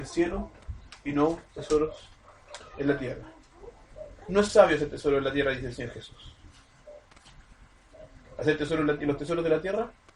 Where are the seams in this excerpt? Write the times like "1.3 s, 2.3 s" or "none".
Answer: none